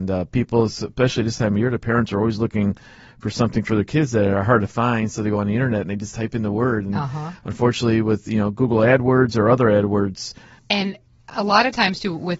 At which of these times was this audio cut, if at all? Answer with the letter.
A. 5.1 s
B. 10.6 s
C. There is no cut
B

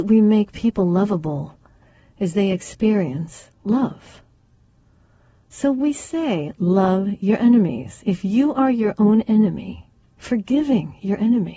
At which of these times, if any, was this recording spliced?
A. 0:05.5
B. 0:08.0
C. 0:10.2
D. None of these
C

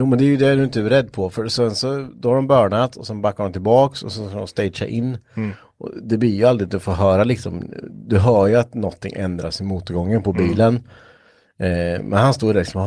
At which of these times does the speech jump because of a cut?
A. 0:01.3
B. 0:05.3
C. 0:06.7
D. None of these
D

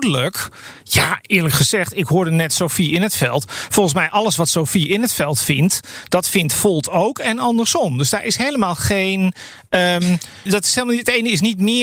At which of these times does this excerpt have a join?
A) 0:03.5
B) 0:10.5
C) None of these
B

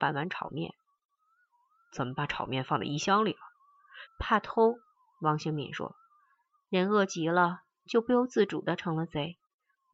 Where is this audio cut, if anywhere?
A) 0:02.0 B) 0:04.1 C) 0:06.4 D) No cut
B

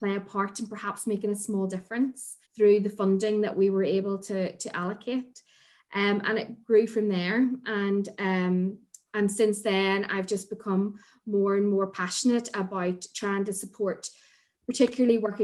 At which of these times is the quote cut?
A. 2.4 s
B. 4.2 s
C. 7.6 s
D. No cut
A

